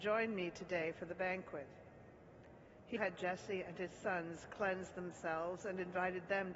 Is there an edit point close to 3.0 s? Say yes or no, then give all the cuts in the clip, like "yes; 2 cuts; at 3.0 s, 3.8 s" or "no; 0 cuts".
yes; 1 cut; at 3.0 s